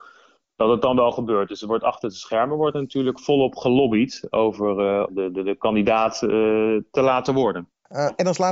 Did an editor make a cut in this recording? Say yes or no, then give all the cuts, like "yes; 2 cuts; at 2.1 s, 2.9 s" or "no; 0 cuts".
yes; 1 cut; at 5.1 s